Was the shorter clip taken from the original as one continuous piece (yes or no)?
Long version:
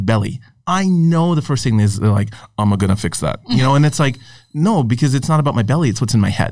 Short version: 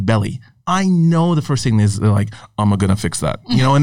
yes